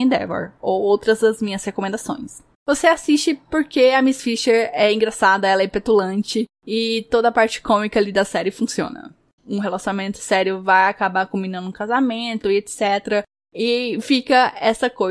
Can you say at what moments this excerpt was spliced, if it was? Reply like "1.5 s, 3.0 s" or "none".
2.5 s, 9.4 s